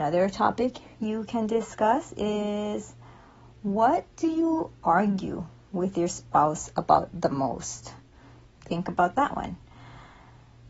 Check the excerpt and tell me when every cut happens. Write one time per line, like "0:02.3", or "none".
0:08.5